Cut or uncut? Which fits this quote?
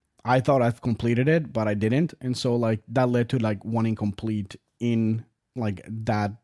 uncut